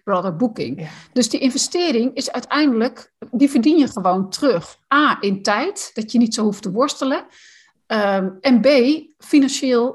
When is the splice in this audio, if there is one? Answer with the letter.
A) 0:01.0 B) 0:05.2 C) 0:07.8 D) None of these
D